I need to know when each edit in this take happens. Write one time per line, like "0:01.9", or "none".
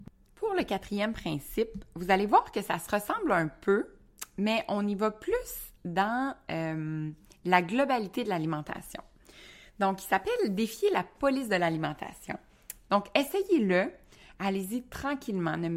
0:12.9